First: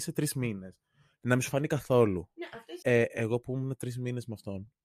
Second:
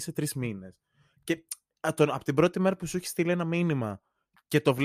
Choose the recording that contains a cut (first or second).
first